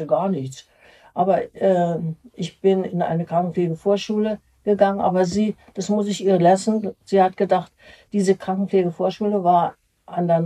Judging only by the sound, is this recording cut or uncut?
uncut